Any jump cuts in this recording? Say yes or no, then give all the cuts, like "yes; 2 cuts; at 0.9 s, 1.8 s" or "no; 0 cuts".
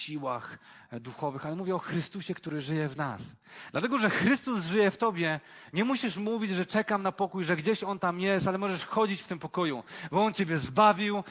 no; 0 cuts